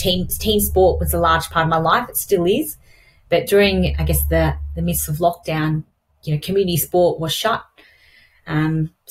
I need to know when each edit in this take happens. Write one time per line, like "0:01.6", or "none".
0:03.9